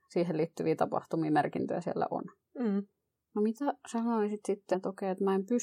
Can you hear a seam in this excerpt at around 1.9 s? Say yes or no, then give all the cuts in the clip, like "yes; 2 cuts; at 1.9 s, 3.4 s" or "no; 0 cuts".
no; 2 cuts; at 3.1 s, 4.7 s